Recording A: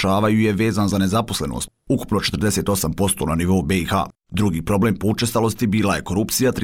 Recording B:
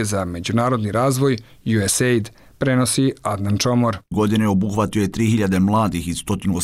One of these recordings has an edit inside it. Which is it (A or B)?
B